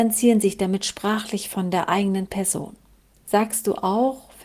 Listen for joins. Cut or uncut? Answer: cut